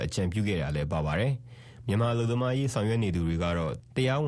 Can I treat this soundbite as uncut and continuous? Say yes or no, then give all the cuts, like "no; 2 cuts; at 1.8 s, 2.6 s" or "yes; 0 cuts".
yes; 0 cuts